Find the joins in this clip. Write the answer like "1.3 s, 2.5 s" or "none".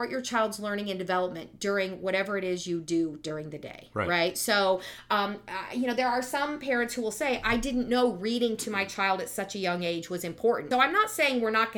10.7 s